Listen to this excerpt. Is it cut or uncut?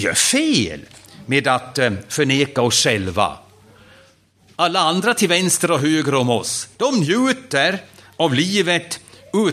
uncut